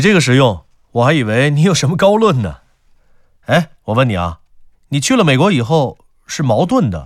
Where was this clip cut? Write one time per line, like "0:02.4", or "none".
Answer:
none

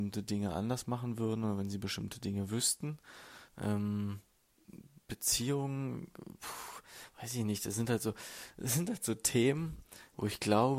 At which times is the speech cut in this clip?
0:03.5

